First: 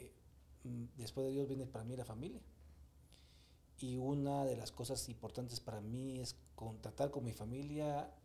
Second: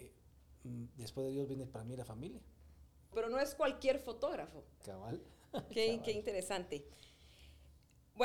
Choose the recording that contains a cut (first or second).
second